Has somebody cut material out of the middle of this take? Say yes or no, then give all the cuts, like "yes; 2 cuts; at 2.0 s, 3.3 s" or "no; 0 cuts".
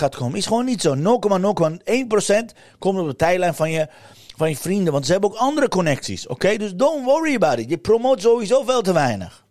no; 0 cuts